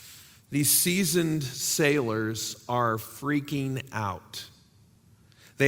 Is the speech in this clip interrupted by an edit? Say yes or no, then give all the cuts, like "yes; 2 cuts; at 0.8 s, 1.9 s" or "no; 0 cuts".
no; 0 cuts